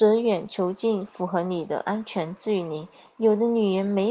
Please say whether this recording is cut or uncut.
uncut